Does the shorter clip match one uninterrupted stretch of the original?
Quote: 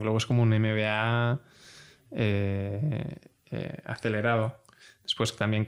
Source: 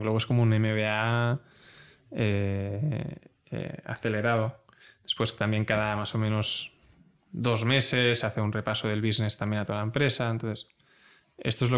yes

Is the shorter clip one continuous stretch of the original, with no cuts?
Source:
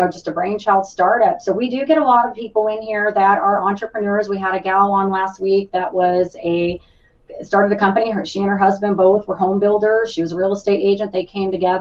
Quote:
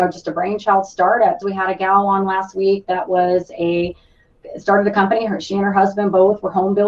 no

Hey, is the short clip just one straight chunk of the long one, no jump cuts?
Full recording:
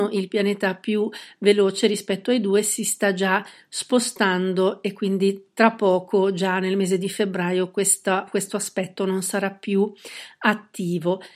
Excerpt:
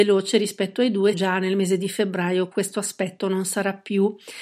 no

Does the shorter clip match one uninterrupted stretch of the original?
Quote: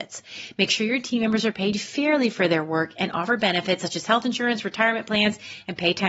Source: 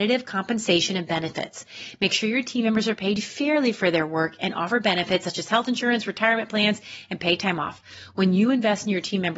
yes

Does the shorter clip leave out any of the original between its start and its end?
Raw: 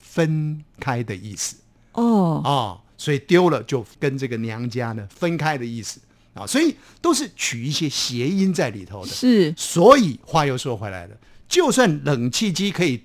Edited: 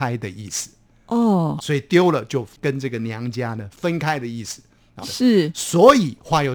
yes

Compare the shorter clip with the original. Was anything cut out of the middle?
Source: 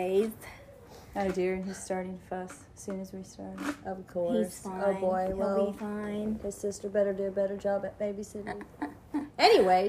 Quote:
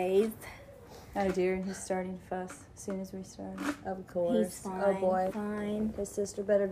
yes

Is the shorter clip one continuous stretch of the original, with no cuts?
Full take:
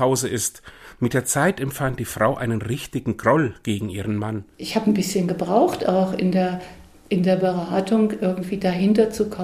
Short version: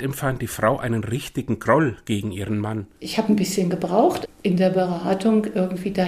no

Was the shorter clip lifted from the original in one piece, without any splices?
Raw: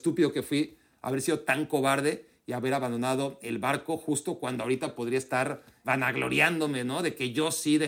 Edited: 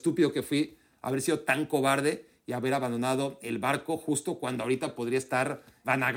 yes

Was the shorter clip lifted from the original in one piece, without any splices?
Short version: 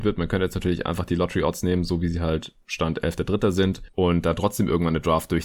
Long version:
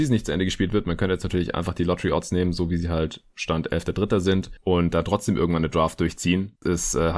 yes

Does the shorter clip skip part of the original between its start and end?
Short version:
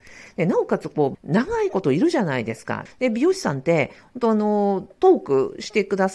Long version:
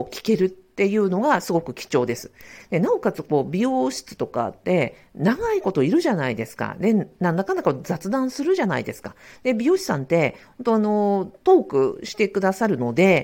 yes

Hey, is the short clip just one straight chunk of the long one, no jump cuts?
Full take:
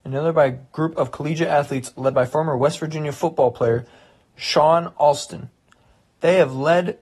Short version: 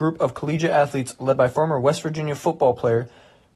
yes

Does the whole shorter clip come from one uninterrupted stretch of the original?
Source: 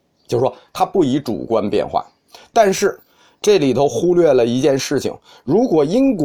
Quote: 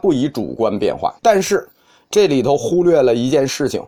no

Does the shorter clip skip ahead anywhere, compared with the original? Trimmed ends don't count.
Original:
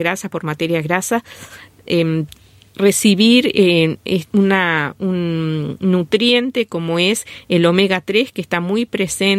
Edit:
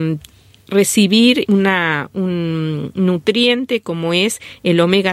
yes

